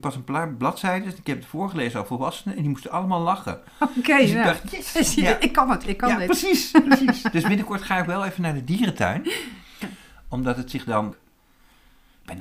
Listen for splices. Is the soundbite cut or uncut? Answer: cut